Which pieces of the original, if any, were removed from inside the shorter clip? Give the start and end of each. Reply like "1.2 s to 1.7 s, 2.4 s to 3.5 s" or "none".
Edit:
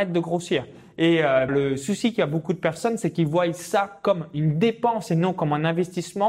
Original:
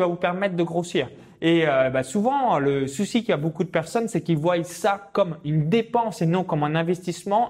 1.9 s to 2.6 s

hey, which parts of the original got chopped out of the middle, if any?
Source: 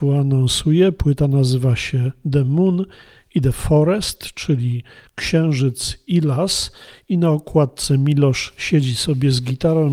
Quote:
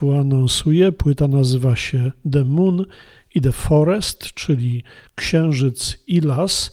none

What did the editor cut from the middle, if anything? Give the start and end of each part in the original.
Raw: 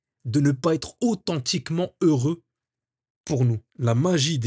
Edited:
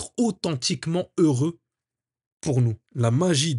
none

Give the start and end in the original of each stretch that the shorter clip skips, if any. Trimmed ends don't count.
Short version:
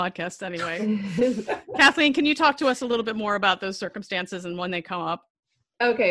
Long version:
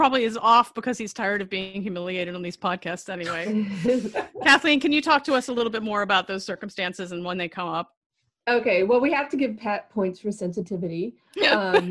none

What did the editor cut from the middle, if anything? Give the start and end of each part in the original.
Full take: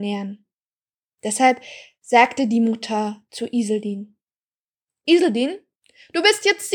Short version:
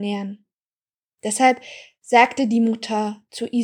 none

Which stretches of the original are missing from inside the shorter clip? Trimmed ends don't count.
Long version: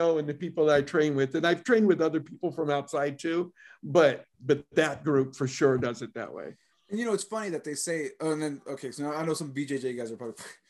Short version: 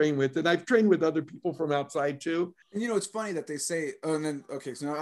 3.6 s to 6.8 s

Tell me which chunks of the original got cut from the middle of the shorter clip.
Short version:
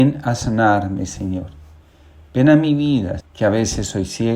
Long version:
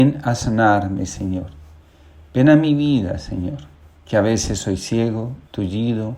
3.2 s to 3.9 s

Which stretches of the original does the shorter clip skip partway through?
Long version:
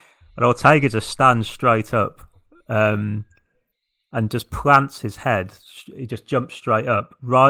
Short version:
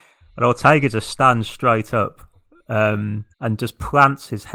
3.3 s to 4.0 s

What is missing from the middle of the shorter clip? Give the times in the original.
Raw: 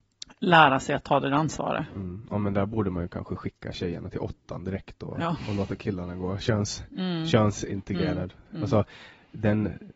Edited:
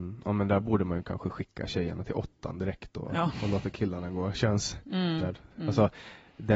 7.3 s to 8.1 s

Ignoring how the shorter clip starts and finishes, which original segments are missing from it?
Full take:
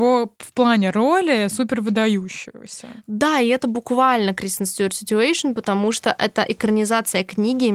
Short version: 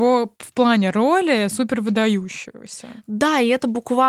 none

